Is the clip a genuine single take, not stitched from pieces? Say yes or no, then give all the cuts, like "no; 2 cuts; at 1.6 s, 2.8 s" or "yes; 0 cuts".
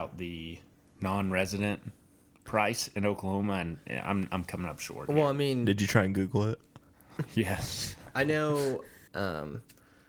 no; 1 cut; at 9.1 s